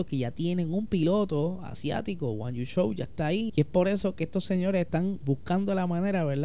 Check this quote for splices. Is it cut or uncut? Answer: cut